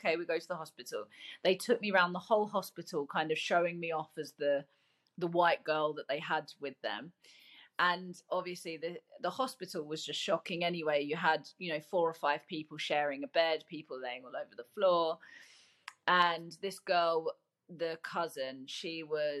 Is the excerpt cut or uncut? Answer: uncut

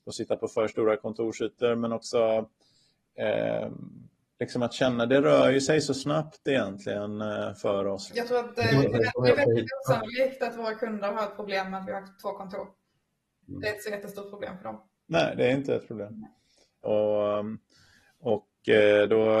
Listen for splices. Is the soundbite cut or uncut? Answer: cut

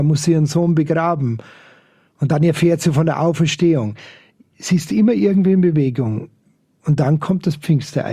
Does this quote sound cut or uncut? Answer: uncut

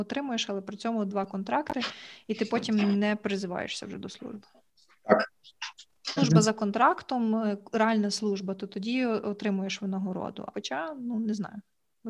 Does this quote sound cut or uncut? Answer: cut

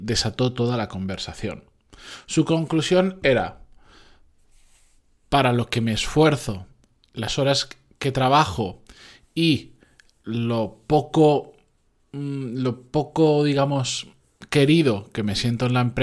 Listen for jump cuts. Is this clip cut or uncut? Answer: uncut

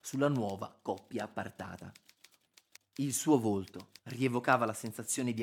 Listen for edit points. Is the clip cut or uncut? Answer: cut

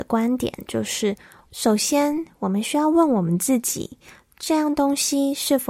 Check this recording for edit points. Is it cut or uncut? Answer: uncut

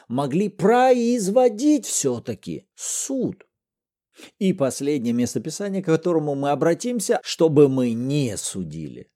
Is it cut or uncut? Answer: cut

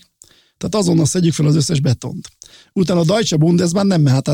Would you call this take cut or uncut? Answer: uncut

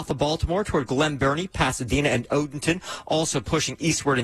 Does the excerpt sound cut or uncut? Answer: uncut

